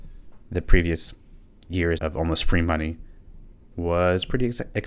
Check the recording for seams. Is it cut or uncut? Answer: cut